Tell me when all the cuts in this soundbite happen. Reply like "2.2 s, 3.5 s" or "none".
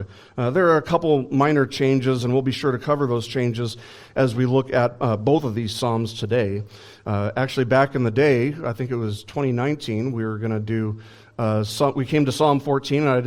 none